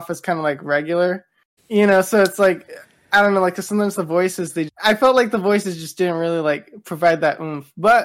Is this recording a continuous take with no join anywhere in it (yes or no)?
no